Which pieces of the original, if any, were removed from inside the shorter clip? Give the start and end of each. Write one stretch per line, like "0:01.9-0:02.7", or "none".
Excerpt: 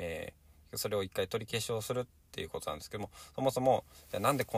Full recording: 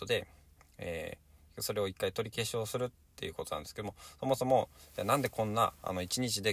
none